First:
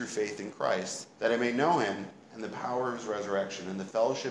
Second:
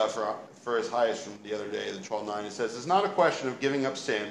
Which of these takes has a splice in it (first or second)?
first